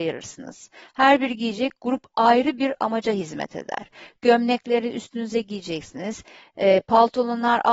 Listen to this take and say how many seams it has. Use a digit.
0